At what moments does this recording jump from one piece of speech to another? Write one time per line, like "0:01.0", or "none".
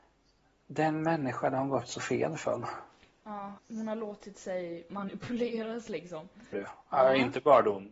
0:03.6
0:06.5